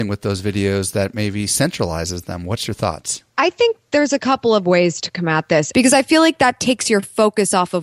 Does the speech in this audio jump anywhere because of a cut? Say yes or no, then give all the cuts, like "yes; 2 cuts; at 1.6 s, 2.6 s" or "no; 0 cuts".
yes; 2 cuts; at 3.3 s, 5.7 s